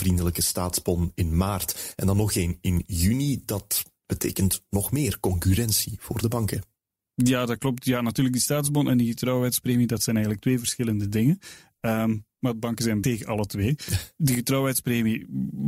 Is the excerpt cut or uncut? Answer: uncut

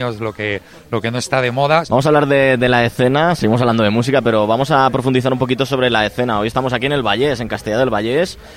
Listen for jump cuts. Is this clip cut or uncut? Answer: cut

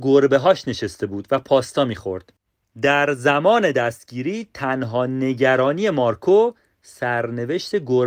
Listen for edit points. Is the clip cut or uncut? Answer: uncut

